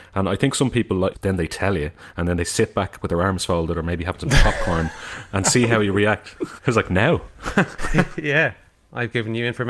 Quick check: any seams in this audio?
yes; 3 cuts; at 1.1 s, 6.6 s, 7.8 s

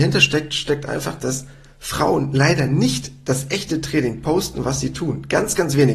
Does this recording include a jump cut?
no; 0 cuts

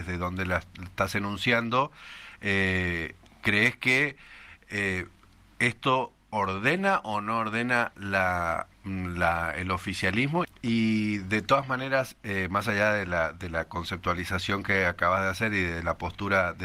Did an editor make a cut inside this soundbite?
yes; 1 cut; at 10.4 s

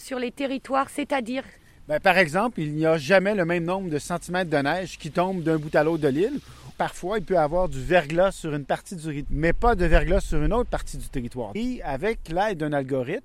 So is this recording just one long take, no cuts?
no; 3 cuts; at 6.7 s, 9.3 s, 11.5 s

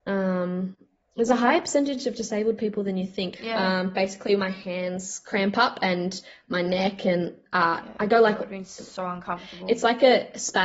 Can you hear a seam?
yes; 1 cut; at 3.4 s

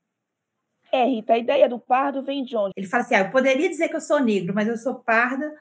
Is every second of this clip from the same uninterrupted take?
no; 1 cut; at 2.7 s

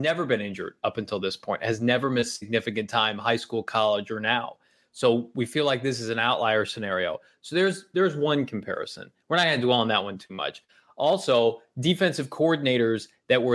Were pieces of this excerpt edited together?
no; 0 cuts

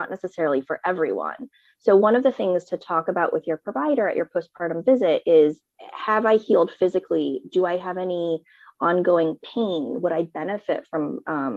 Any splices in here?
no; 0 cuts

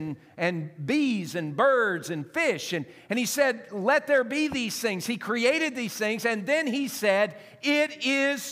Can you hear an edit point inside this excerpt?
no; 0 cuts

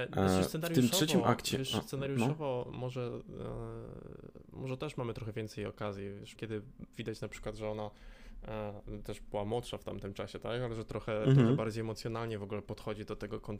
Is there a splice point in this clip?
yes; 1 cut; at 6.4 s

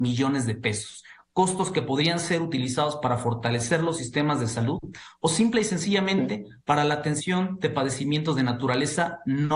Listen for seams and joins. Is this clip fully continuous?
yes; 0 cuts

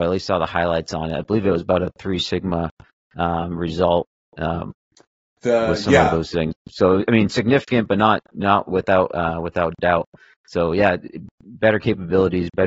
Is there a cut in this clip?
no; 0 cuts

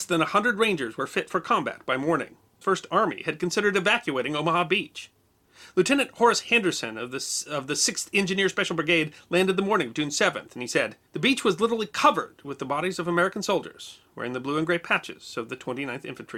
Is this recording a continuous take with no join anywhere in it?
no; 2 cuts; at 2.6 s, 11.1 s

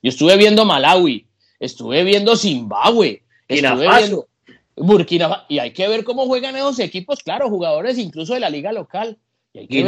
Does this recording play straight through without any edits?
yes; 0 cuts

